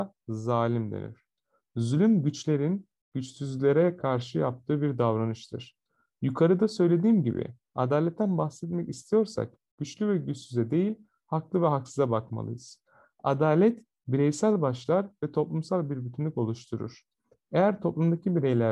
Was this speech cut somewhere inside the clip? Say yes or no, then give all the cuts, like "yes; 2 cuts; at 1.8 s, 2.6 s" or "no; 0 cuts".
no; 0 cuts